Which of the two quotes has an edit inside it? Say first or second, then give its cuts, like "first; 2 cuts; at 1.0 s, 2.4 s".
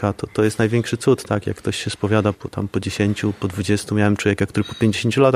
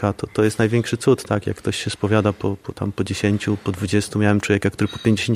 first; 1 cut; at 2.3 s